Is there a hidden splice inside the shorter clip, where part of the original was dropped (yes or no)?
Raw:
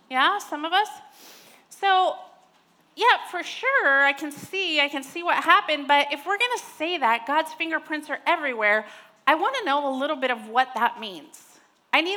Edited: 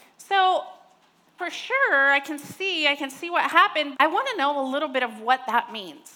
yes